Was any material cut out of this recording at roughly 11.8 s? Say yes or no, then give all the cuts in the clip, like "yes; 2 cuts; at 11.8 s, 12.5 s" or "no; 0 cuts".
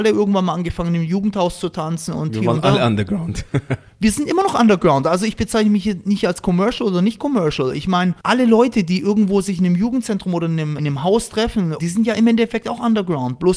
yes; 3 cuts; at 8.2 s, 10.8 s, 11.8 s